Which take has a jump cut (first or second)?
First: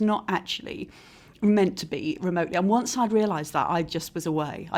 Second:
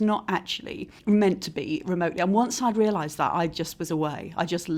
second